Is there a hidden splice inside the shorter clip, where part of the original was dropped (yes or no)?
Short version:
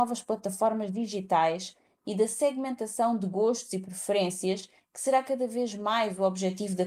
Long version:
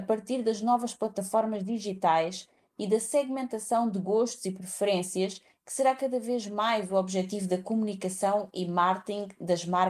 no